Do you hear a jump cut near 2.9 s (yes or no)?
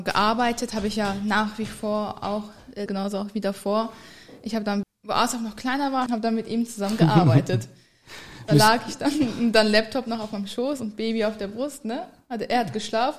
yes